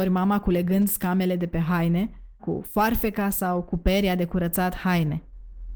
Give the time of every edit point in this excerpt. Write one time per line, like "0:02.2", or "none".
0:02.4